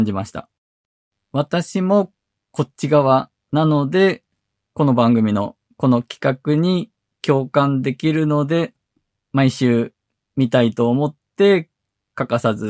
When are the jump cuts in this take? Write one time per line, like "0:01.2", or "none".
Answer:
none